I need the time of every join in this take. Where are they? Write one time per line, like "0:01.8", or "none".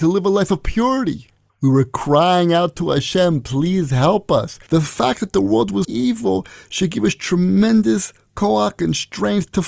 0:04.7
0:05.8